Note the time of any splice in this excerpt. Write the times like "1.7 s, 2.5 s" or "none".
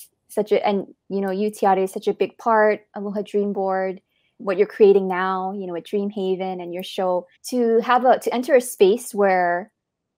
4.4 s, 7.4 s